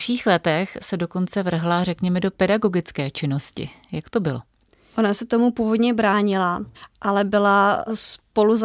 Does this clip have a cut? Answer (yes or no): no